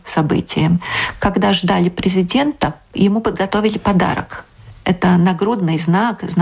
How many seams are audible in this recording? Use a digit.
0